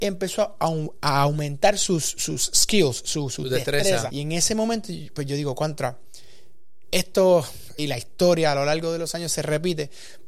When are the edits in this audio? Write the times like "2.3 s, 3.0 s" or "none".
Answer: 4.1 s, 7.8 s

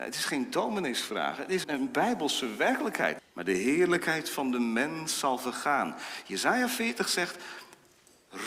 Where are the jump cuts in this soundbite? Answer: 1.6 s, 3.2 s

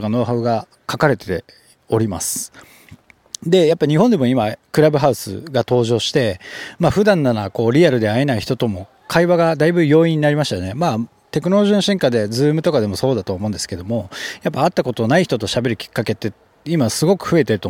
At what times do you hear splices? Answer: none

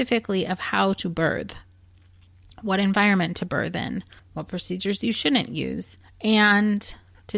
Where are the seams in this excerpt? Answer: 4.2 s

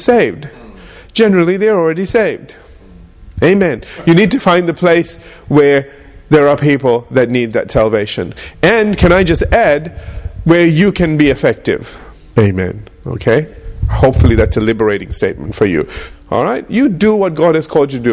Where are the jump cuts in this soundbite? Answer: 12.3 s, 16.1 s

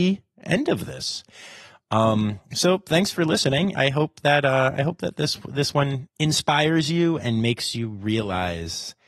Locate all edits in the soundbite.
3.7 s, 6.1 s, 7.2 s

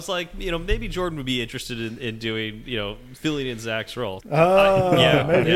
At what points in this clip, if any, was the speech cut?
4.2 s

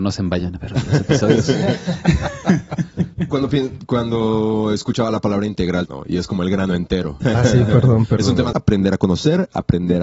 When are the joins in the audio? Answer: 5.9 s, 7.2 s, 8.5 s

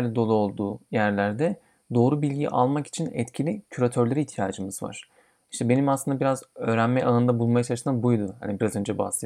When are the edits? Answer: none

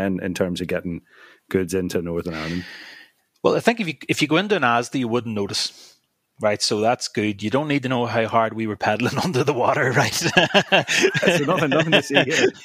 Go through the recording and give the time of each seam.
none

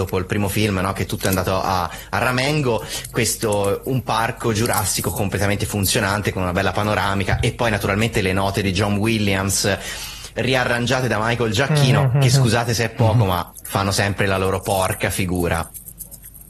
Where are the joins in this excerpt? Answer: none

